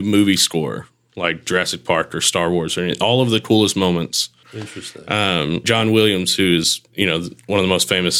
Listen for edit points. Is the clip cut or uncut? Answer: cut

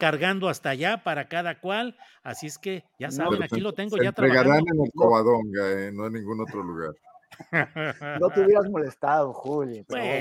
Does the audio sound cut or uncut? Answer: uncut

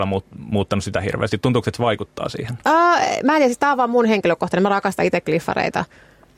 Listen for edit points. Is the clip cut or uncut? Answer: uncut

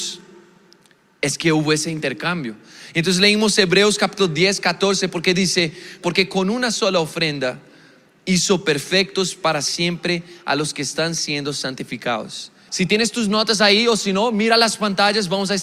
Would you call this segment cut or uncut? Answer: cut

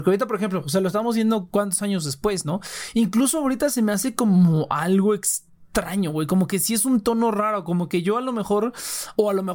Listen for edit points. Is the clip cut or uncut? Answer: uncut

